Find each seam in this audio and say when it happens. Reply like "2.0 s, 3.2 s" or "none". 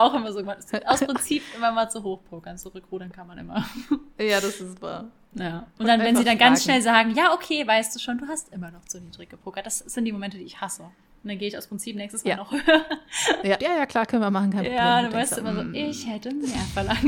13.6 s